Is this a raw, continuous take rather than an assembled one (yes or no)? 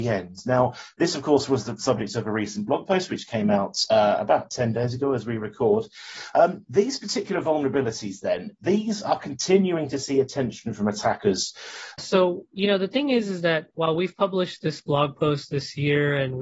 no